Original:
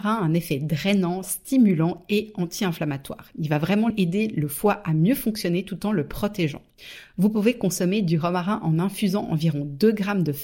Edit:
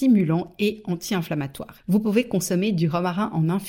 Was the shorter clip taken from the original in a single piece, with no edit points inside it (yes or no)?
no